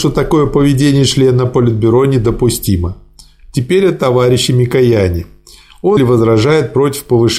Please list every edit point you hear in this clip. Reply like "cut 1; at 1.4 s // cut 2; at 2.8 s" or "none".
cut 1; at 6.0 s

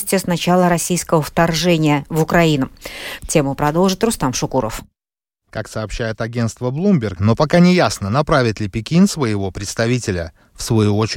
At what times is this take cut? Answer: cut 1; at 3.2 s // cut 2; at 7.2 s

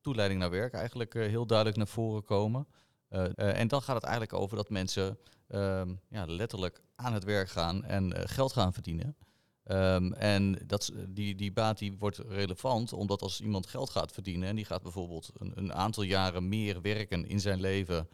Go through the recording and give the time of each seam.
cut 1; at 3.3 s

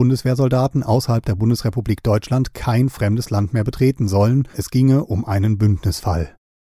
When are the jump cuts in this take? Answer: cut 1; at 4.5 s

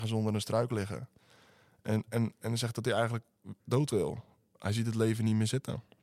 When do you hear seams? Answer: none

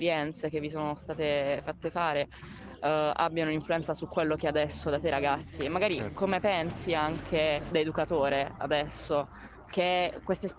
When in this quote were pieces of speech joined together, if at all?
none

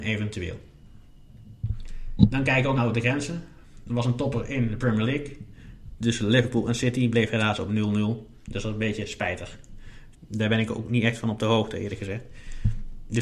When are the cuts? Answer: cut 1; at 2.8 s // cut 2; at 10.1 s

